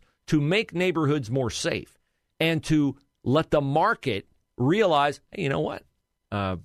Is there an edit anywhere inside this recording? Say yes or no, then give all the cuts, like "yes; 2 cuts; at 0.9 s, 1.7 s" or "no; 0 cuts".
no; 0 cuts